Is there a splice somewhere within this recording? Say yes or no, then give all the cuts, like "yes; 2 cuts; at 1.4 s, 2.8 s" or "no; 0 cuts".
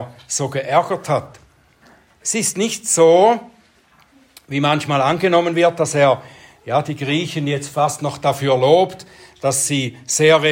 no; 0 cuts